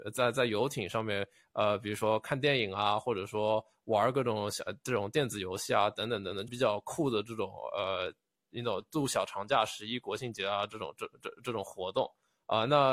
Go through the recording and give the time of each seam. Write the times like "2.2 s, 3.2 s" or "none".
6.5 s